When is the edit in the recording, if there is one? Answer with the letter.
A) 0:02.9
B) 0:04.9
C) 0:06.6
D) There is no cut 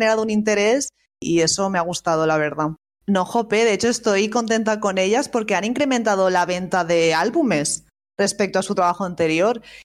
A